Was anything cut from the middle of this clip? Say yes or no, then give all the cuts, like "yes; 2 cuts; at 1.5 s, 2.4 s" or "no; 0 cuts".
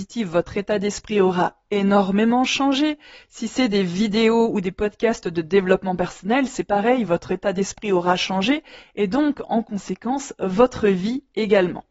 no; 0 cuts